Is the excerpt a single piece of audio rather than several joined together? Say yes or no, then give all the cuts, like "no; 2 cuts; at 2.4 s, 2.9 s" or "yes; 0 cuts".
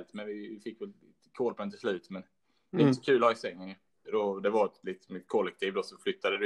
no; 1 cut; at 4.0 s